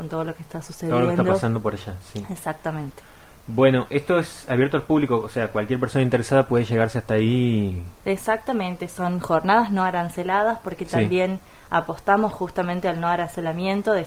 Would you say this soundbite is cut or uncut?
uncut